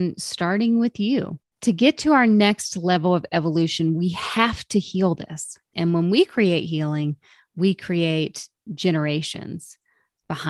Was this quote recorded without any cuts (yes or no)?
no